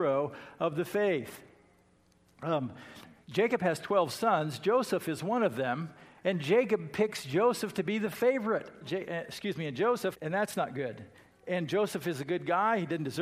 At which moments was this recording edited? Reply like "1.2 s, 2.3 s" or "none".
3.2 s, 8.8 s, 10.1 s